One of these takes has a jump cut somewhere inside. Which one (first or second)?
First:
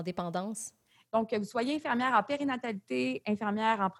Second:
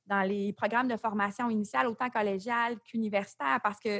first